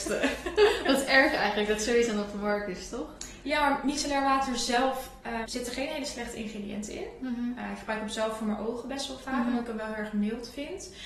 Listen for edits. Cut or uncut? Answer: cut